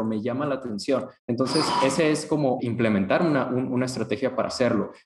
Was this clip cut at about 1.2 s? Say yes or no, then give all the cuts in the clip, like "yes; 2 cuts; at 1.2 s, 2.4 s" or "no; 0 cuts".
yes; 2 cuts; at 1.2 s, 2.6 s